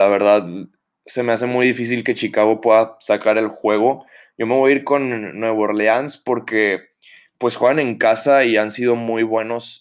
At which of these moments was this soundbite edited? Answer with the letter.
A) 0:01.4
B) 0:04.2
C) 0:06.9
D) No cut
D